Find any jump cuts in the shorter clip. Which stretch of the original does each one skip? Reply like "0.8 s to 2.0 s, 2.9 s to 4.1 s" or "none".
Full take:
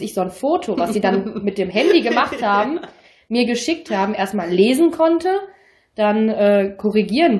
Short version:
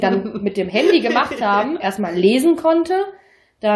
2.8 s to 4.1 s